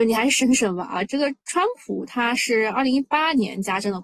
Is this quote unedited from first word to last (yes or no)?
no